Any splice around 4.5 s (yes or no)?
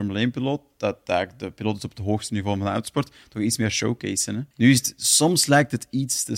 yes